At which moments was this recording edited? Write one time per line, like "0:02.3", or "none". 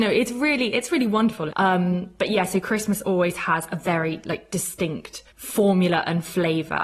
0:01.5
0:05.3